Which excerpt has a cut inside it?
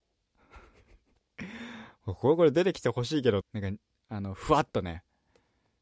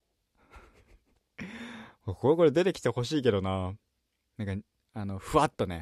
first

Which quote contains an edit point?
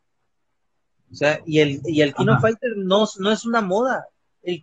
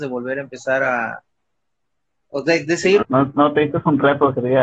second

